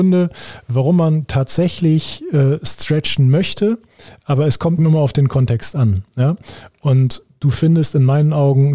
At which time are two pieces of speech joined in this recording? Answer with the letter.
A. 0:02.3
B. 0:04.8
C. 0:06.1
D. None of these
B